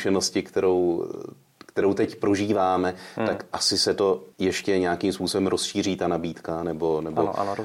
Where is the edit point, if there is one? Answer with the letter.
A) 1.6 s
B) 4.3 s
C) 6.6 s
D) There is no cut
B